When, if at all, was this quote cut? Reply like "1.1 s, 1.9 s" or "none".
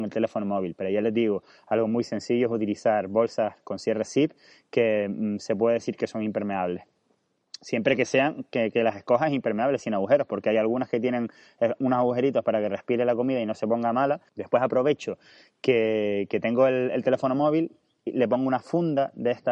14.3 s